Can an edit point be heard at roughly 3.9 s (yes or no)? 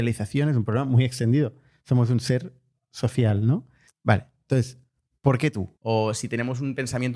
yes